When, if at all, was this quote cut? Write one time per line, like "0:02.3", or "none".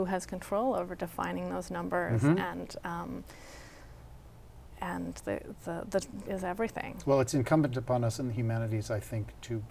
0:06.3